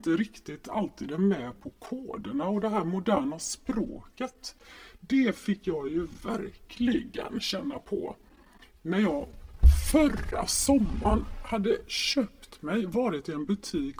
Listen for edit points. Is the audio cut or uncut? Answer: uncut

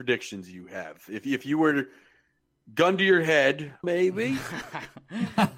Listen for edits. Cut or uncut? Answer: cut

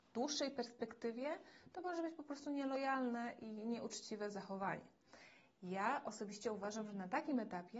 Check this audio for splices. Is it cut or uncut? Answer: uncut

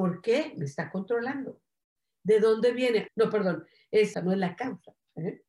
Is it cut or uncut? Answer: cut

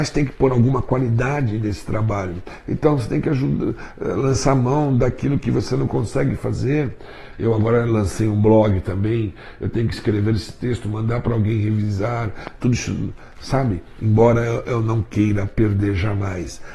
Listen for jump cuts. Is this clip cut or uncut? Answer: cut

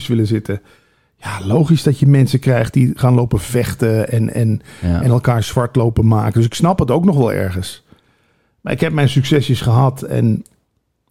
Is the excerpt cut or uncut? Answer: uncut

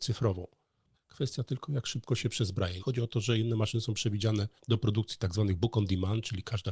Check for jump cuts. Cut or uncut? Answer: cut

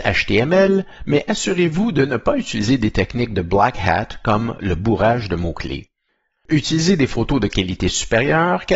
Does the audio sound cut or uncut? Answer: uncut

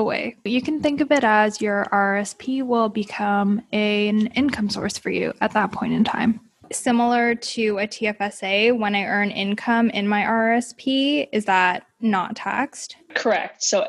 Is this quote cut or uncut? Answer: uncut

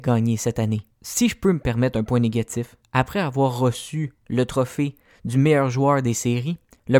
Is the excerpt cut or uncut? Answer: cut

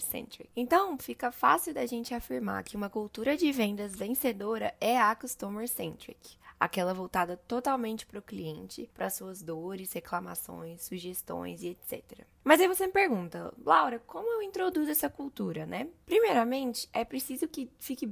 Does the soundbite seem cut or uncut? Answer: cut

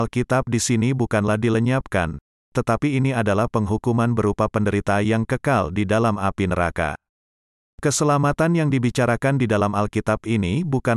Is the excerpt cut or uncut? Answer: uncut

